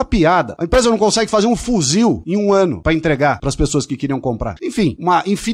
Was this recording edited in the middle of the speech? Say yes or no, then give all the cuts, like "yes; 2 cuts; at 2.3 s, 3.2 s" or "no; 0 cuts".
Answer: yes; 1 cut; at 4.6 s